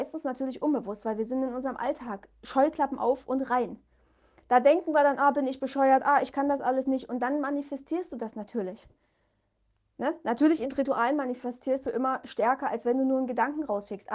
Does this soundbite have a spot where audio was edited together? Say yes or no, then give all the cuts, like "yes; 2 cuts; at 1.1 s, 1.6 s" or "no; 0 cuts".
no; 0 cuts